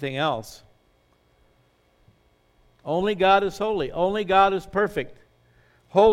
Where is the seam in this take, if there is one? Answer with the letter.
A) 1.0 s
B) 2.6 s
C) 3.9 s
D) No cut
B